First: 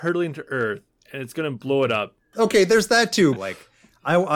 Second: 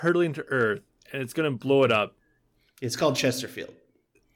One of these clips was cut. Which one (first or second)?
first